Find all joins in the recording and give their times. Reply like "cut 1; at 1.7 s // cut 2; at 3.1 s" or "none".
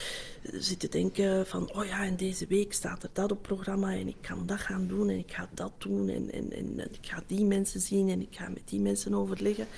none

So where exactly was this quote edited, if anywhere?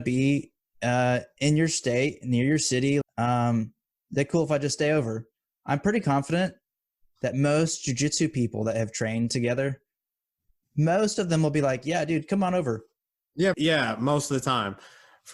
cut 1; at 3.0 s // cut 2; at 13.5 s

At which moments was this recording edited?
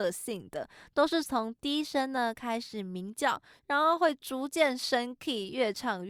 none

